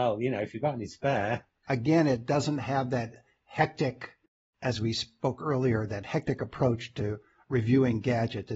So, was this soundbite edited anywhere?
yes; 1 cut; at 1.6 s

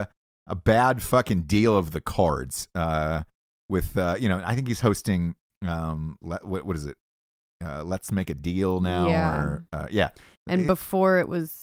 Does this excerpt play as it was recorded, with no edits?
yes; 0 cuts

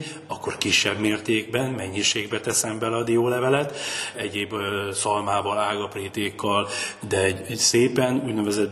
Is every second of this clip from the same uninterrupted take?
no; 2 cuts; at 4.1 s, 7.0 s

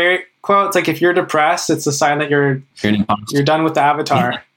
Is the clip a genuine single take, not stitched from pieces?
no; 1 cut; at 2.7 s

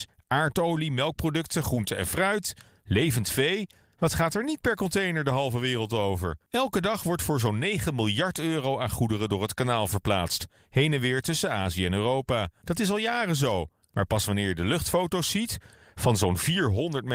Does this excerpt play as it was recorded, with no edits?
yes; 0 cuts

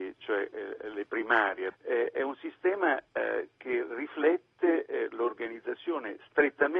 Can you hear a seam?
yes; 1 cut; at 1.7 s

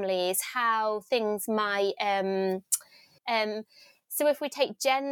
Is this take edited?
yes; 1 cut; at 3.2 s

